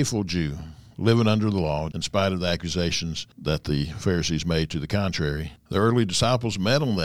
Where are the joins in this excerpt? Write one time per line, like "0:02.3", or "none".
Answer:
0:01.9
0:05.6